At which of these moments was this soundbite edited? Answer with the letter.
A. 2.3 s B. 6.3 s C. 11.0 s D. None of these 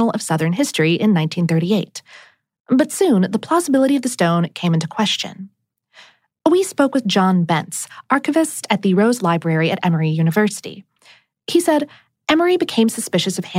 D